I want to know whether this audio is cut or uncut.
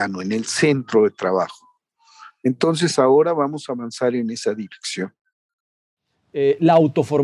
uncut